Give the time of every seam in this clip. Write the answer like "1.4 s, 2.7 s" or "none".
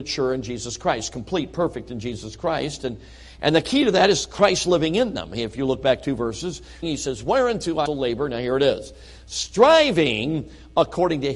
6.8 s, 7.9 s

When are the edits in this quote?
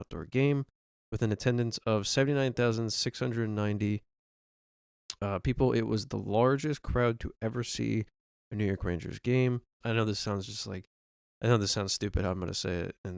9.8 s

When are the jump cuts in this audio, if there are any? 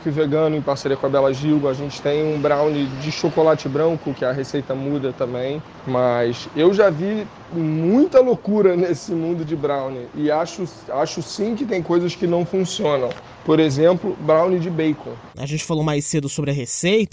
15.3 s

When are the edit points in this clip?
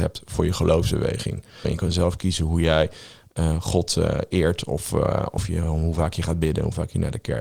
1.6 s

